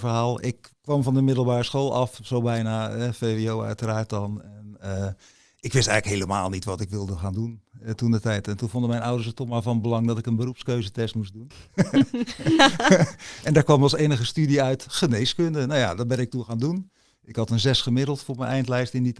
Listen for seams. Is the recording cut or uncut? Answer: uncut